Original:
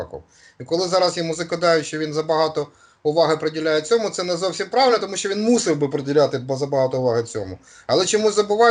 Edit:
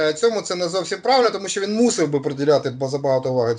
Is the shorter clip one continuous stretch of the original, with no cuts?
yes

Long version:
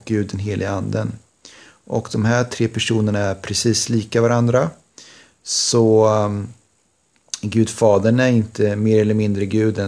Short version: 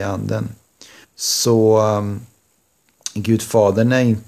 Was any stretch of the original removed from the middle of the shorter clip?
yes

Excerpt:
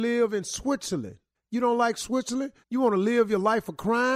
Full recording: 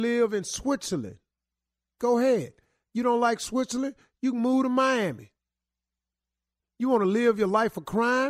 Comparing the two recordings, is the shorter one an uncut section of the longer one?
no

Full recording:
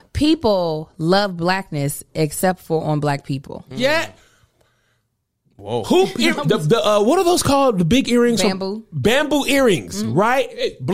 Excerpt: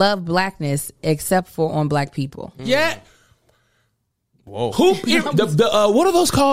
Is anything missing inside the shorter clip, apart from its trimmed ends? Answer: no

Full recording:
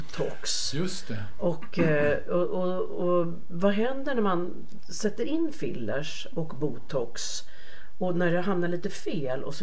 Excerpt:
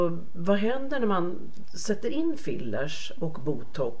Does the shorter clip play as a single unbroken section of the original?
yes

